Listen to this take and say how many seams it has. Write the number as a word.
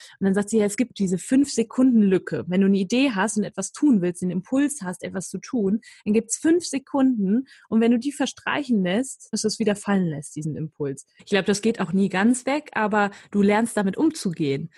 two